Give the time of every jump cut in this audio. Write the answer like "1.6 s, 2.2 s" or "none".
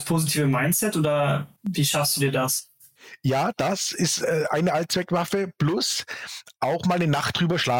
1.6 s